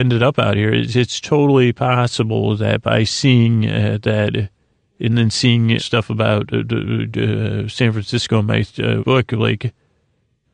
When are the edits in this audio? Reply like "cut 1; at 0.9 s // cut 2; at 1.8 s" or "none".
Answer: cut 1; at 5.8 s // cut 2; at 9.0 s